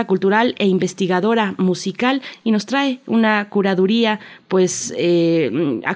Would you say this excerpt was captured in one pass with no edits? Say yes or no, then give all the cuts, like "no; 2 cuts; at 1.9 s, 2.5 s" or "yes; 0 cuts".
yes; 0 cuts